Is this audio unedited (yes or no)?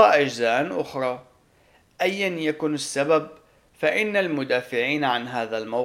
yes